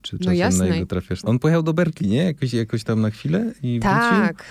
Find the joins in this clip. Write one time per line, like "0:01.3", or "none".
0:01.2

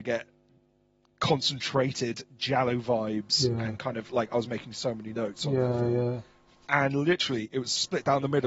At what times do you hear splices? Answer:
0:06.6

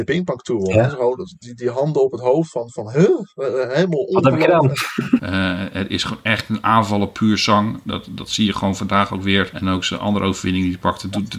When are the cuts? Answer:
0:05.2

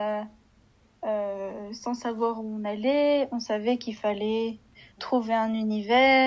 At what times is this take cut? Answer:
0:05.0

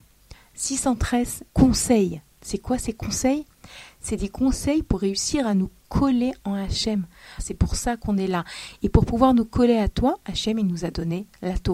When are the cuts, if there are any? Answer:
0:01.5
0:07.4

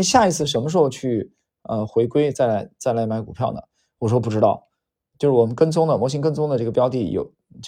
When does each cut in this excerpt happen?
0:02.3
0:05.1

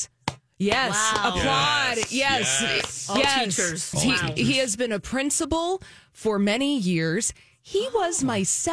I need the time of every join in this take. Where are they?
0:03.9

